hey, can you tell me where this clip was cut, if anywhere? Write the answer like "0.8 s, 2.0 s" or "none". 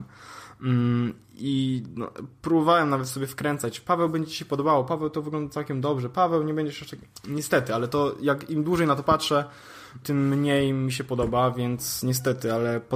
10.0 s